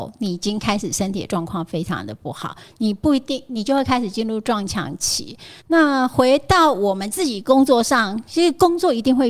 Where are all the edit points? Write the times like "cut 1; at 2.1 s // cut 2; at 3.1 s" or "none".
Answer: cut 1; at 5.6 s